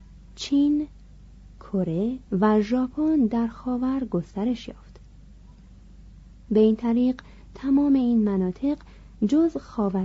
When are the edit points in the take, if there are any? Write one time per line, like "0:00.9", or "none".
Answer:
0:02.3